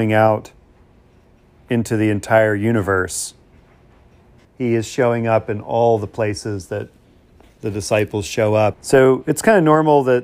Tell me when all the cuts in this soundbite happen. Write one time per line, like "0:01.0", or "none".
0:04.4
0:08.7